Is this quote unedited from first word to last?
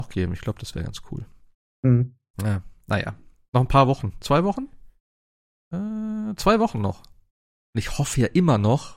no; 1 cut; at 7.6 s

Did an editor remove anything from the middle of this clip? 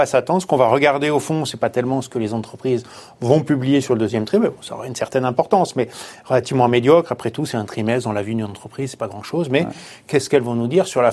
no; 0 cuts

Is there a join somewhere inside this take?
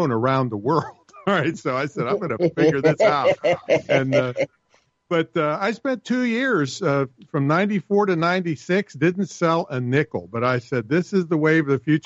no; 0 cuts

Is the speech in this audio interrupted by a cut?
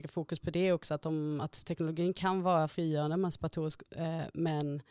no; 0 cuts

